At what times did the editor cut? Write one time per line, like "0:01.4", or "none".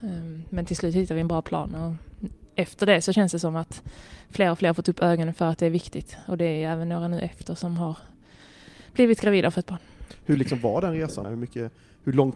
0:11.2